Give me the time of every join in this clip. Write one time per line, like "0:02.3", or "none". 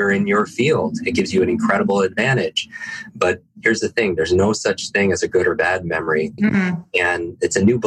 0:06.4